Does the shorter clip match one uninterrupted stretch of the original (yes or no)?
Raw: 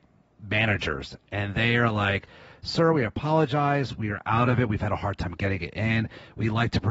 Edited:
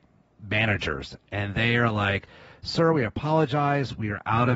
yes